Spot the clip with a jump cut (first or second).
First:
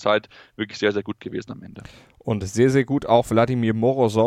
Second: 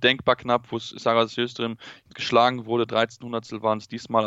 second